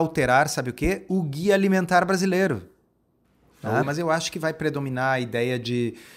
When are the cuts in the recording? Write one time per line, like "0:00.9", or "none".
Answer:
0:03.8